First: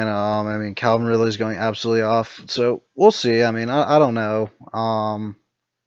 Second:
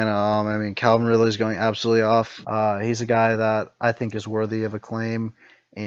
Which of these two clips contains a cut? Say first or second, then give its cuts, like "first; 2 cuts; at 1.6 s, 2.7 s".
second; 1 cut; at 2.4 s